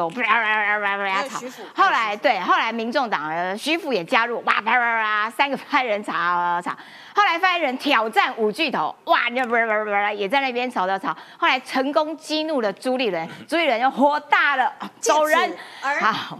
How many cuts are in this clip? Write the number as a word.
zero